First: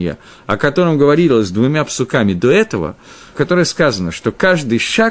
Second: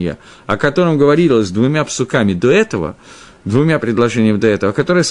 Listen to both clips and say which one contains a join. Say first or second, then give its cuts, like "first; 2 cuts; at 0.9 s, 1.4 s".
first; 1 cut; at 3.4 s